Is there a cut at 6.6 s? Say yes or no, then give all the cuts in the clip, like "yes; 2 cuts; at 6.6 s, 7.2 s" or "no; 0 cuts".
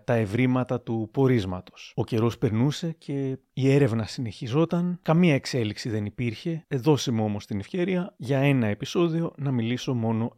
yes; 1 cut; at 6.6 s